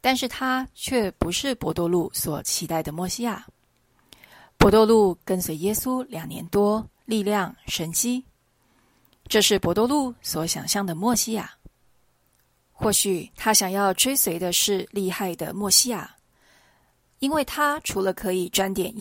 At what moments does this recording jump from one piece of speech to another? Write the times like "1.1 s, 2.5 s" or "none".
7.0 s